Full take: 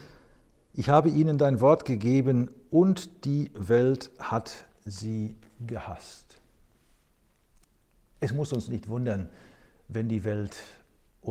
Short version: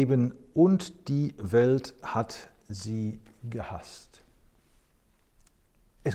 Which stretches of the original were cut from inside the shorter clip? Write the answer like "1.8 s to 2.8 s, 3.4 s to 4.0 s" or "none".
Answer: none